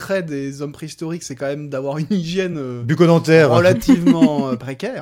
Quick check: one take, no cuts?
yes; 0 cuts

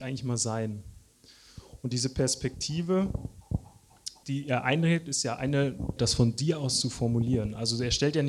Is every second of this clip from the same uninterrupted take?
no; 2 cuts; at 4.2 s, 6.0 s

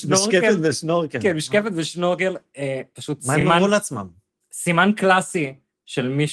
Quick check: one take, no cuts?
yes; 0 cuts

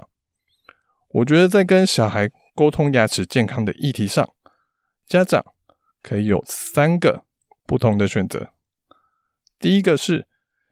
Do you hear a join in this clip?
no; 0 cuts

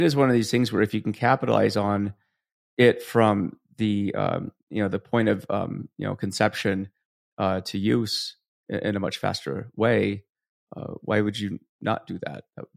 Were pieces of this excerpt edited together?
no; 0 cuts

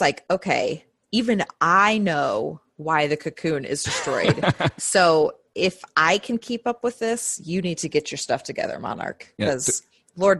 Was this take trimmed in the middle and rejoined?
no; 0 cuts

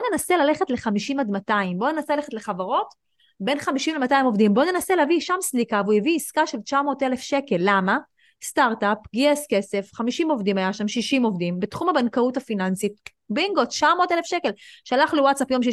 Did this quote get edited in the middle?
no; 0 cuts

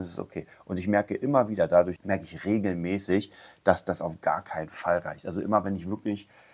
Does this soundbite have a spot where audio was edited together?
yes; 1 cut; at 2.0 s

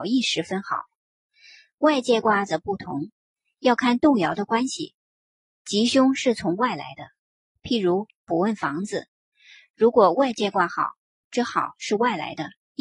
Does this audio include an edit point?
no; 0 cuts

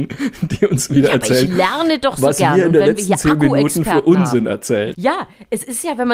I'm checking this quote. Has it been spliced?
yes; 1 cut; at 4.9 s

